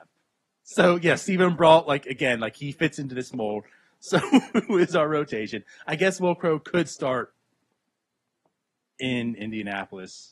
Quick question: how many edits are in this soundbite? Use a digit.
0